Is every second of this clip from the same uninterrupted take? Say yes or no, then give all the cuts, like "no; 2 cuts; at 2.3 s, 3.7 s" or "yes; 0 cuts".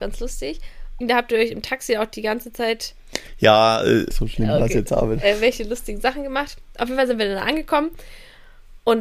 no; 2 cuts; at 1.0 s, 4.1 s